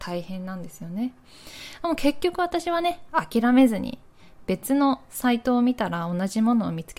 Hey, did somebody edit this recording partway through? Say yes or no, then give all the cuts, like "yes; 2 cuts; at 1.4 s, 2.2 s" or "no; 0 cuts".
no; 0 cuts